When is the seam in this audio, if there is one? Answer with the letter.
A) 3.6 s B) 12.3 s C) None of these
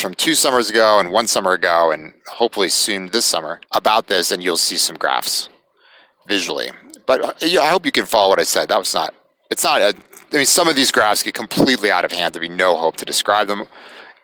A